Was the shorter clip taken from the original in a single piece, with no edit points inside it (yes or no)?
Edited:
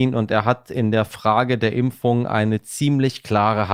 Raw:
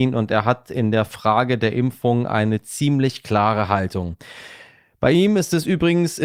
yes